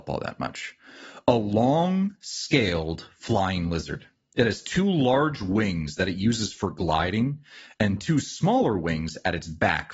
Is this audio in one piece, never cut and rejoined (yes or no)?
yes